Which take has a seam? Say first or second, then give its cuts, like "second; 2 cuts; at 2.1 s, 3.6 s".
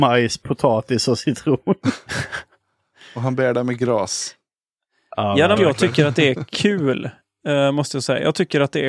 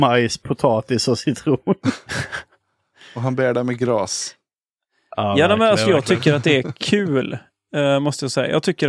first; 1 cut; at 5.6 s